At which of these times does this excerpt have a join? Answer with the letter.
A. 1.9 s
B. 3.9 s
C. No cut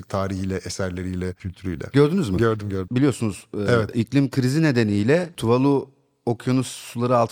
A